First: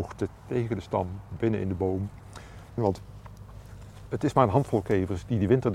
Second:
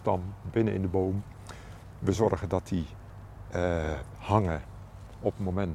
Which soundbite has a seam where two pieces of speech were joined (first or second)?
first